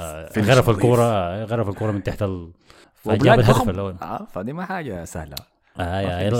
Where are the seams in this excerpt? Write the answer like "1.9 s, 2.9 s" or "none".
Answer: 2.8 s